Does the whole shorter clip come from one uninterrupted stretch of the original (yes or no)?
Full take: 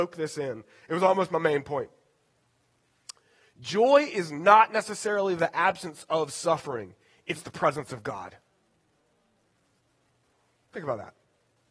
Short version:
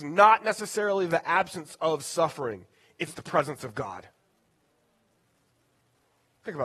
yes